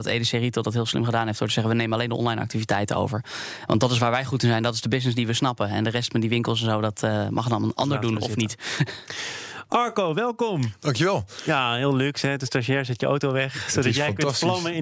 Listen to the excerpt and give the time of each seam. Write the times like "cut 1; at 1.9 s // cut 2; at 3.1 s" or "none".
none